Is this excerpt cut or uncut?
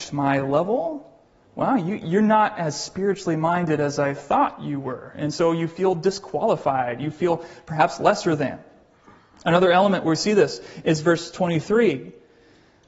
uncut